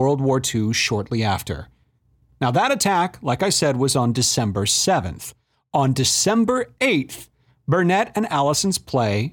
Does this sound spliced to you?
no; 0 cuts

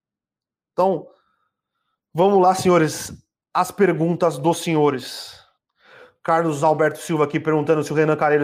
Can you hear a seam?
no; 0 cuts

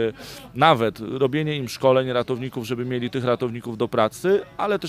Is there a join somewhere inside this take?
no; 0 cuts

